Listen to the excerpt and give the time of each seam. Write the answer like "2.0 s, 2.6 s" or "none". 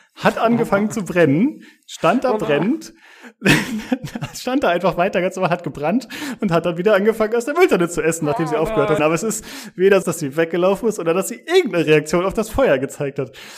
9.0 s, 10.0 s